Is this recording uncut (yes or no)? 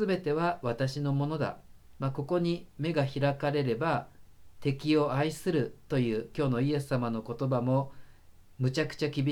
no